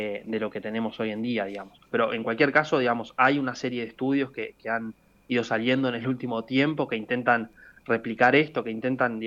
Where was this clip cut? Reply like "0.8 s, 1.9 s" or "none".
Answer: 1.9 s